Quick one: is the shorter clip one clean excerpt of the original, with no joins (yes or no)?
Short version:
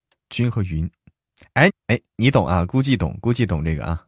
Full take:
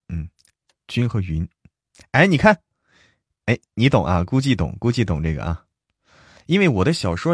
no